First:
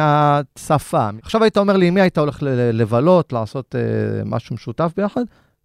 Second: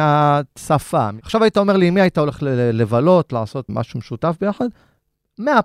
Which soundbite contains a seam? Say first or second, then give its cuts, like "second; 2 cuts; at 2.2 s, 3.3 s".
second; 1 cut; at 3.7 s